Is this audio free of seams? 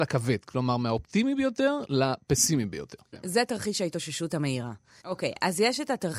no; 2 cuts; at 3.1 s, 5.0 s

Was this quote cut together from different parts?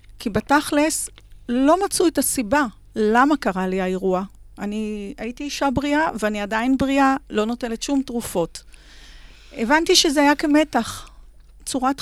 no; 0 cuts

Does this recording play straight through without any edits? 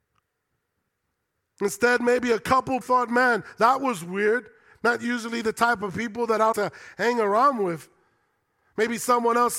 no; 2 cuts; at 2.8 s, 6.5 s

